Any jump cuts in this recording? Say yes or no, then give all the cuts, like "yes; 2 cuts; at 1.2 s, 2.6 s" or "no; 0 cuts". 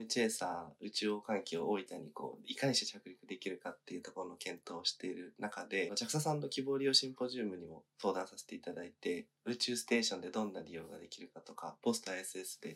yes; 1 cut; at 5.9 s